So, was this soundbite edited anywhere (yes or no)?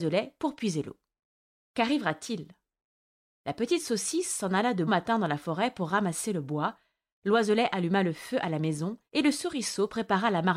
yes